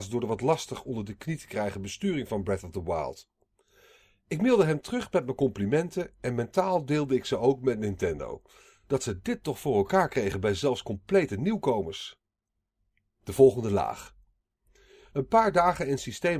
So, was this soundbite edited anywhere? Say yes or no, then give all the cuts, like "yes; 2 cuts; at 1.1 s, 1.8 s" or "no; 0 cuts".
no; 0 cuts